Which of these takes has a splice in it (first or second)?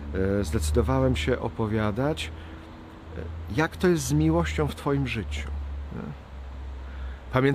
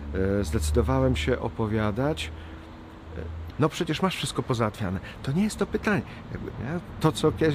second